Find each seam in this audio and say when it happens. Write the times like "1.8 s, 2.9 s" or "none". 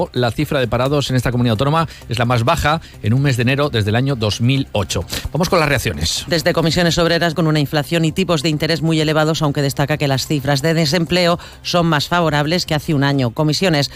7.3 s